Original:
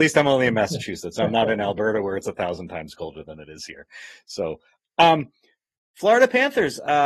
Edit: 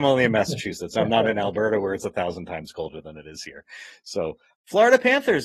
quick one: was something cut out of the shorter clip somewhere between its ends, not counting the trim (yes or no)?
yes